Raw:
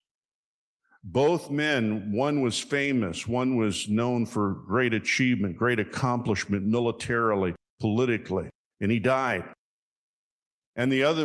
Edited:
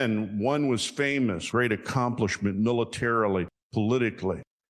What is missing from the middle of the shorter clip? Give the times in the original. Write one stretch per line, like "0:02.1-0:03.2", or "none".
0:03.2-0:05.6